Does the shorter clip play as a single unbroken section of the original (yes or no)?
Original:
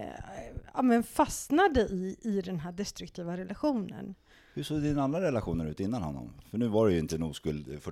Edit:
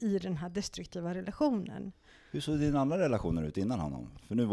yes